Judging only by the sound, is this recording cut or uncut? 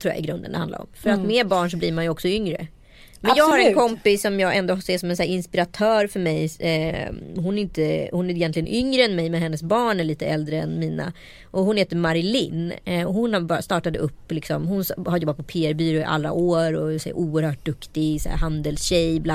uncut